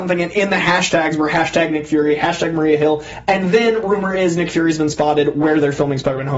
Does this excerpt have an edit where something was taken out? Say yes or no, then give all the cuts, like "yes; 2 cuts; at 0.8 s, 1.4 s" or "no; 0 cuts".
no; 0 cuts